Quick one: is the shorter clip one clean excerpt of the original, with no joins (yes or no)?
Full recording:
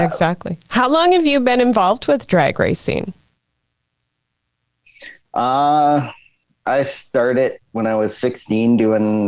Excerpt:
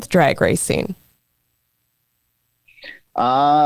yes